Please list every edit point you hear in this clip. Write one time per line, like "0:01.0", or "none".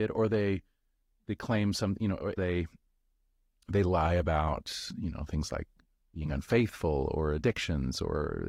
0:02.3